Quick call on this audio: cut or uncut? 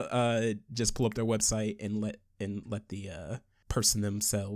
uncut